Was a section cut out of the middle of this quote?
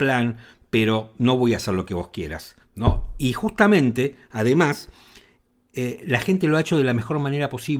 yes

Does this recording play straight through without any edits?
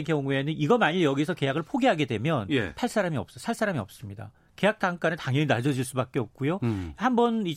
yes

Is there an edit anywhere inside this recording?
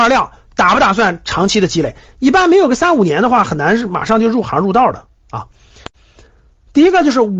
no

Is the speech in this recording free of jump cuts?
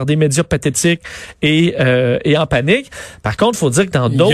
yes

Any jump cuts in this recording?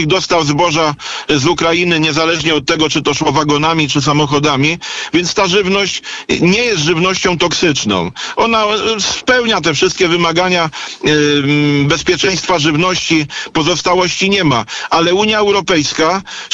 no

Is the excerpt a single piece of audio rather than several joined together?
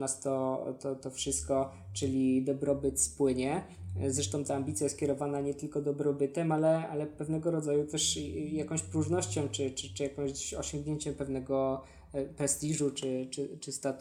yes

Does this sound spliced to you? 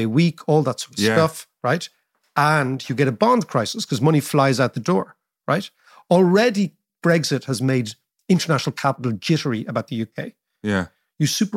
no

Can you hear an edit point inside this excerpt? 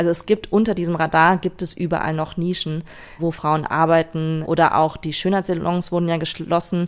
yes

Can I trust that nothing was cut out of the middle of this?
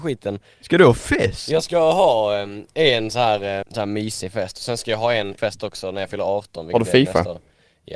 no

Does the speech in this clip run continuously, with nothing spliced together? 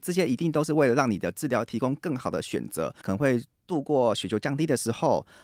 no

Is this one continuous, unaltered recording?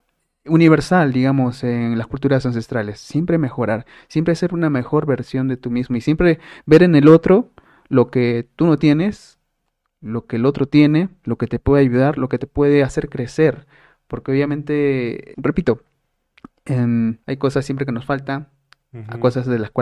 no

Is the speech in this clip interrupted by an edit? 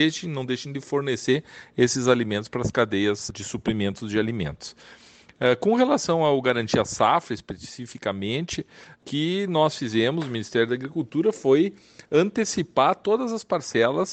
no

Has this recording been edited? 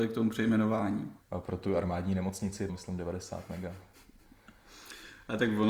yes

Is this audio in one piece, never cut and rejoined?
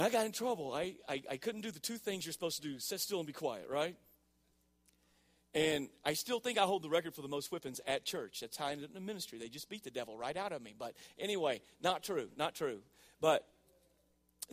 yes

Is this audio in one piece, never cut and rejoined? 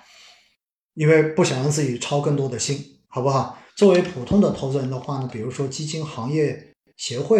no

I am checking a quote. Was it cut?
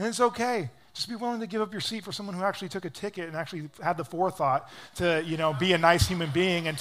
no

